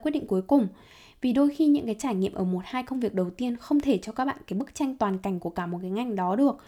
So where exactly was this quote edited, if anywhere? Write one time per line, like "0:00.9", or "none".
none